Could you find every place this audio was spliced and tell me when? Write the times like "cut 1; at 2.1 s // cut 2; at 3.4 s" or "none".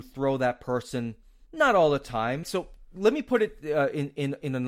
cut 1; at 2.4 s